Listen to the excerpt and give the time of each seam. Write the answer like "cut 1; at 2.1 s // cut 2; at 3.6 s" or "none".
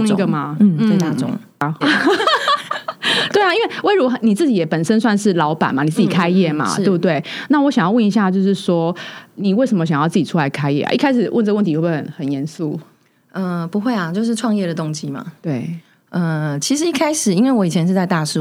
cut 1; at 1.8 s

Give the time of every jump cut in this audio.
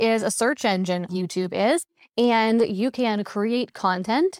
cut 1; at 1.1 s

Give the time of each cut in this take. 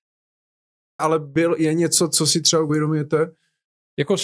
cut 1; at 1.0 s

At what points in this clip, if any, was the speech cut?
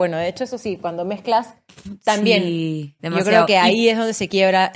cut 1; at 3.0 s

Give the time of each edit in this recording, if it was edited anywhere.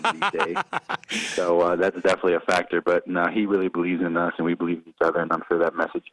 none

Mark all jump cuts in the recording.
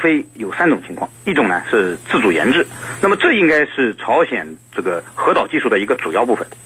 cut 1; at 1.1 s

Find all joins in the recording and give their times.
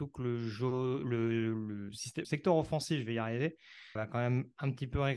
cut 1; at 2.2 s // cut 2; at 4.0 s

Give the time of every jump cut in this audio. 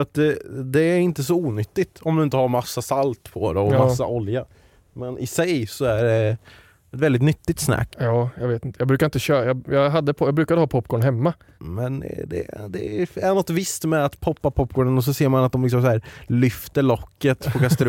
cut 1; at 7.9 s // cut 2; at 11.6 s

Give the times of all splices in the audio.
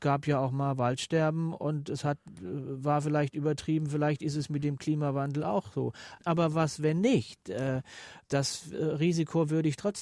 none

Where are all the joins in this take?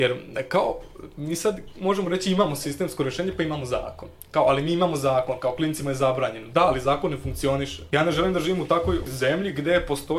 none

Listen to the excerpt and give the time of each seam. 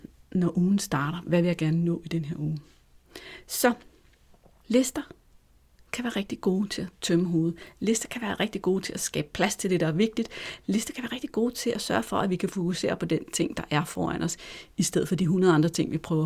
none

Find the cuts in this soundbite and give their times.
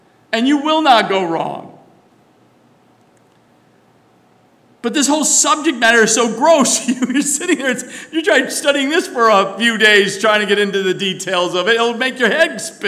none

